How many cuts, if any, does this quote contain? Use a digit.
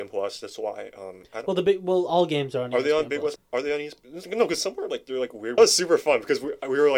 2